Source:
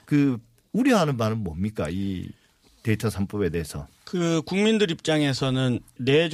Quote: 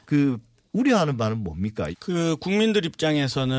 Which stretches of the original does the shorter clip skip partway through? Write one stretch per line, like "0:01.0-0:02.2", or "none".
0:01.9-0:04.0